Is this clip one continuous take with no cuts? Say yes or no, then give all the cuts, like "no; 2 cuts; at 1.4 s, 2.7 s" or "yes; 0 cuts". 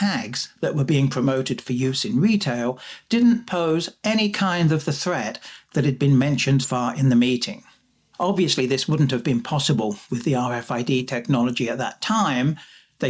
no; 2 cuts; at 6.6 s, 8.1 s